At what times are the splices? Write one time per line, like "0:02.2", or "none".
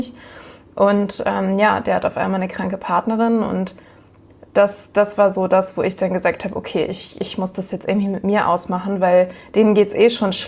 none